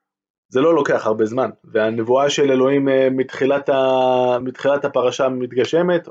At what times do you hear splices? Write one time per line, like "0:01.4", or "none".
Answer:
none